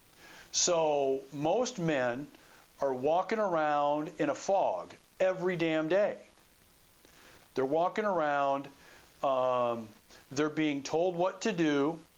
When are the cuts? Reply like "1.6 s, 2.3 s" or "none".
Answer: none